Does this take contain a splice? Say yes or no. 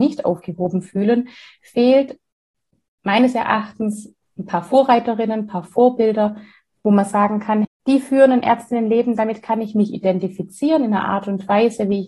yes